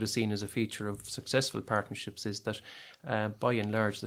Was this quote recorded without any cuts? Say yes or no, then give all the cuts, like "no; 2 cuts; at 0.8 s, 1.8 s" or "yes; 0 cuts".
yes; 0 cuts